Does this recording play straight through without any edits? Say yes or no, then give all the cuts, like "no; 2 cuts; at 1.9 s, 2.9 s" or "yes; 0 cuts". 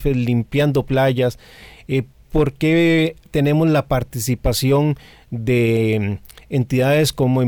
yes; 0 cuts